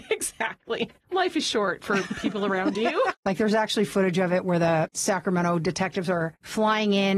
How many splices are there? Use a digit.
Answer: 2